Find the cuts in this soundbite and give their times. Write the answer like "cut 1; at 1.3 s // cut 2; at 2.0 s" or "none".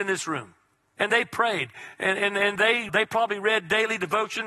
cut 1; at 1.0 s // cut 2; at 2.9 s